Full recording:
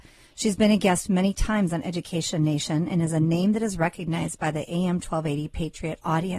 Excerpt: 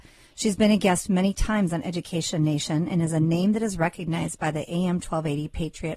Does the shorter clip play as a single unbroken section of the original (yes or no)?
yes